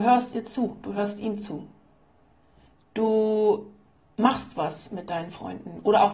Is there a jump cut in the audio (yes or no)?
no